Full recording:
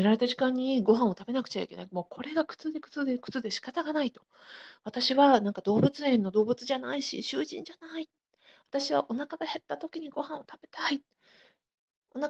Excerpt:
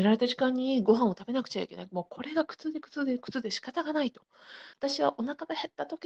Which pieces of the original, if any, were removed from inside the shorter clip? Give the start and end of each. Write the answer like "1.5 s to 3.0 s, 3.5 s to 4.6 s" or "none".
4.7 s to 8.6 s